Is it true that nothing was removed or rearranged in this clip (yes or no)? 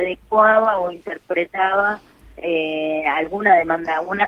yes